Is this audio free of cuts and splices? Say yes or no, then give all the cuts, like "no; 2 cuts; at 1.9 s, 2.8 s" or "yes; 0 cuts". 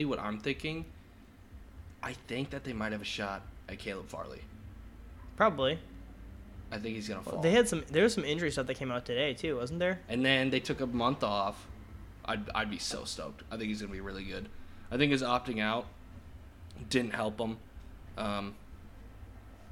no; 2 cuts; at 10.1 s, 12.2 s